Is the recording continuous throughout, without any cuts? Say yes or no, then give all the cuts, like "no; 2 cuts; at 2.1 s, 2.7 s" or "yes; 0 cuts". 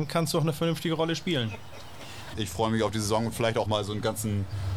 no; 2 cuts; at 2.3 s, 3.6 s